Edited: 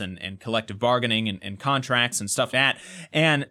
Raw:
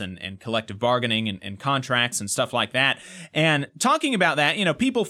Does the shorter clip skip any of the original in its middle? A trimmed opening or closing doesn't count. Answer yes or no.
yes